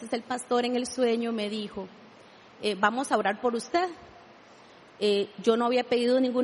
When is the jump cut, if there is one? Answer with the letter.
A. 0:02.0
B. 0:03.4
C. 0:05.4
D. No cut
D